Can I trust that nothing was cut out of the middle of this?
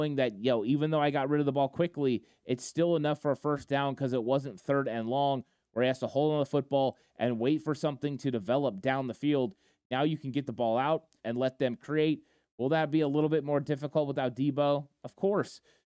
no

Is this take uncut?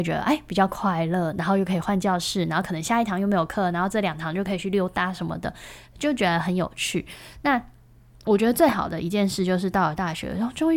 yes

